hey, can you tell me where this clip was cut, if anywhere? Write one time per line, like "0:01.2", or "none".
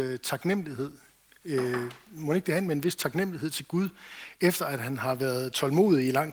none

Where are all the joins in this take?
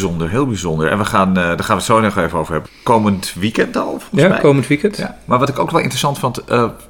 0:02.6

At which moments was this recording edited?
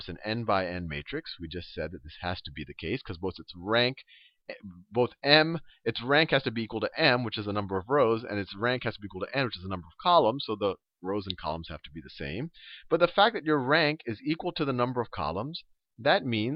none

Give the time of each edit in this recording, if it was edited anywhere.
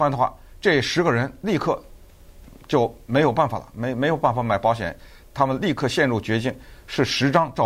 none

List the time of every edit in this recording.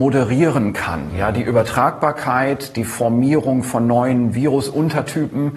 none

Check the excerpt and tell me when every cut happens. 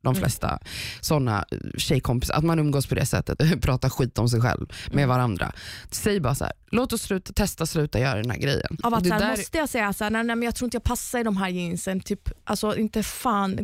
0:03.4
0:08.8

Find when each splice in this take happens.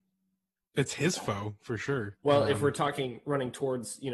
0:02.2

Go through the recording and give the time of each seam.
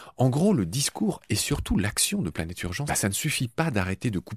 0:02.9

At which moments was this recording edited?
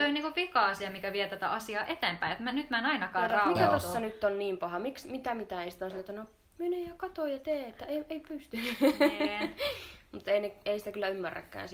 none

